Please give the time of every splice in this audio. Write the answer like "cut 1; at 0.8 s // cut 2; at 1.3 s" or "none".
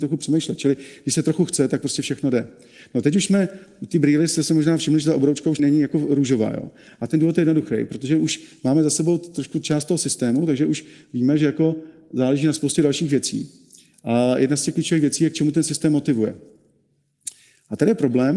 cut 1; at 5.6 s

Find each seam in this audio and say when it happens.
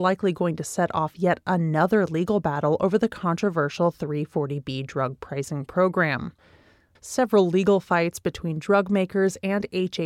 cut 1; at 7.0 s

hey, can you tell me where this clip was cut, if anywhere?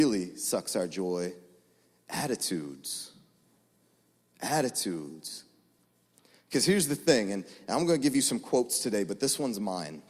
none

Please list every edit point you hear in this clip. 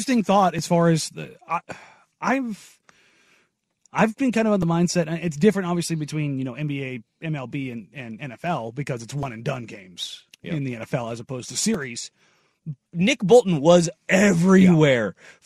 cut 1; at 12.9 s

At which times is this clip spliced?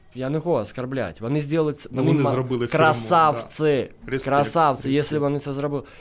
none

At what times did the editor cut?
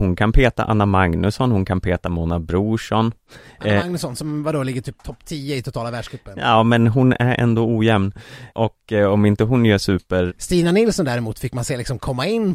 cut 1; at 8.5 s // cut 2; at 10.3 s

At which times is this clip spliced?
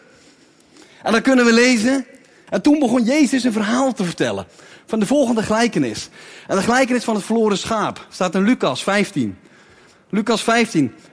cut 1; at 2.5 s

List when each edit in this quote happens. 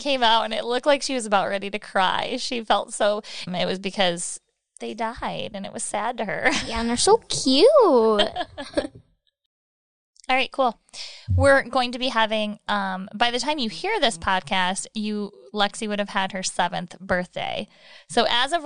cut 1; at 3.5 s

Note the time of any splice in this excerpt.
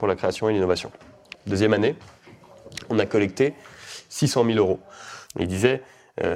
cut 1; at 1.3 s // cut 2; at 5.3 s

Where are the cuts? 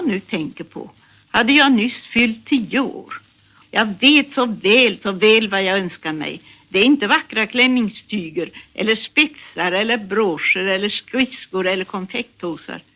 cut 1; at 3.6 s

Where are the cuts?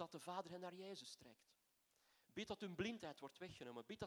none

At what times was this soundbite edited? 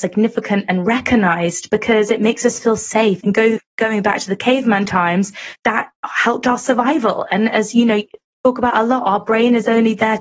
cut 1; at 3.2 s

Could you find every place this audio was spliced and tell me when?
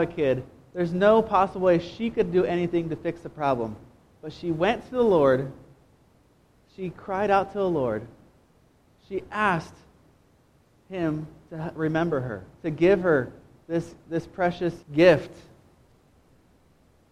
cut 1; at 12.6 s // cut 2; at 14.8 s

